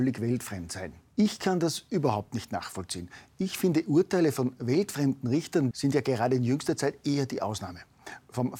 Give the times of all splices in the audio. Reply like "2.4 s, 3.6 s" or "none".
1.1 s, 5.7 s